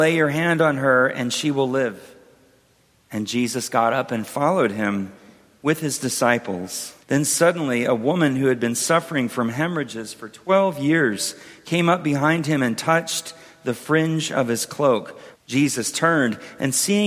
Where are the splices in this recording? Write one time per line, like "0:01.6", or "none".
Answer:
0:07.0
0:15.3